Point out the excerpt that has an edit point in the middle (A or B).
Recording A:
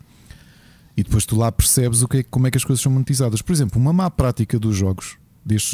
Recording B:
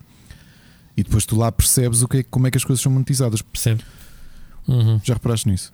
B